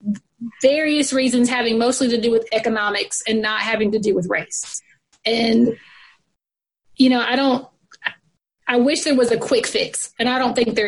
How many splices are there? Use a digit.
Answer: 0